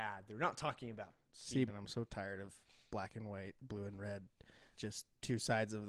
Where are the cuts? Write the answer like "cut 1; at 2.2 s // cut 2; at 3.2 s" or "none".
cut 1; at 1.7 s // cut 2; at 4.8 s